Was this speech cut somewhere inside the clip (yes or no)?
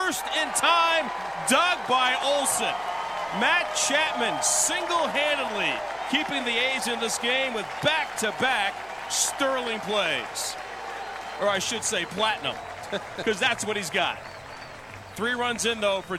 no